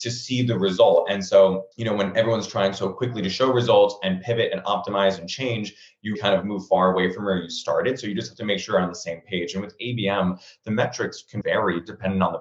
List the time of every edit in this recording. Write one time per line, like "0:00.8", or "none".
0:01.7
0:06.1
0:11.4